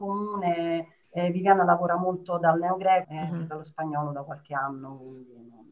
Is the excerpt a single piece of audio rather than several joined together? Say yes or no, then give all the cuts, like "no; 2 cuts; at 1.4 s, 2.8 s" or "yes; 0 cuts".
no; 2 cuts; at 1.0 s, 3.0 s